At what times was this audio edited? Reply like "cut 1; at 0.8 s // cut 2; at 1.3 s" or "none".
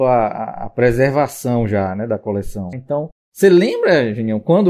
cut 1; at 2.7 s